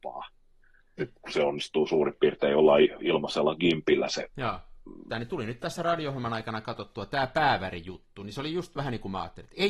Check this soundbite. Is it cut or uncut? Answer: cut